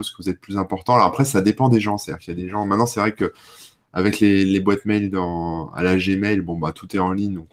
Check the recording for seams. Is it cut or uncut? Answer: uncut